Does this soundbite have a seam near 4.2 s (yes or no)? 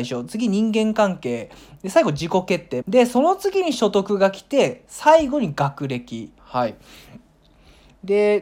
no